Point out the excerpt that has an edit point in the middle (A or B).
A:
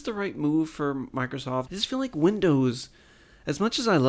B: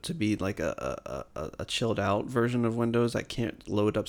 A